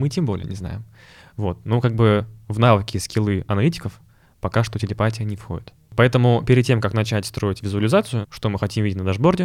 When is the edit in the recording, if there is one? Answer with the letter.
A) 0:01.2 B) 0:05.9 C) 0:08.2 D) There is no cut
C